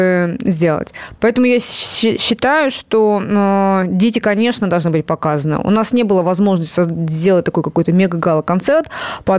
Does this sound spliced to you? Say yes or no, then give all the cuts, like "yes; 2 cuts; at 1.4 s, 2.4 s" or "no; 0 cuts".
no; 0 cuts